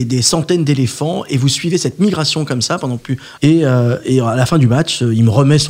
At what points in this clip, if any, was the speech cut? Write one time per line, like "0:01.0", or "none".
0:03.4